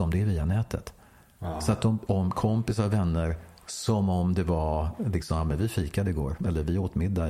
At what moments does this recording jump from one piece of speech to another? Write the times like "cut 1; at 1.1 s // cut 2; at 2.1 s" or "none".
cut 1; at 2.1 s